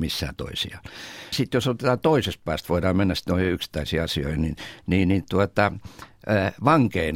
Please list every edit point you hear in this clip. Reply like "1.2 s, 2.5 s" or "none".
1.3 s